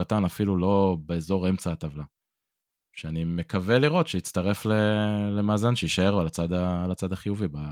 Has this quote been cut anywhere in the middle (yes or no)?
yes